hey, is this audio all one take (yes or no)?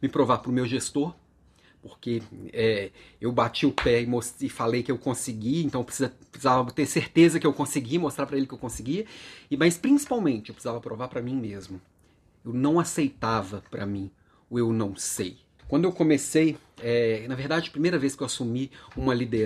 no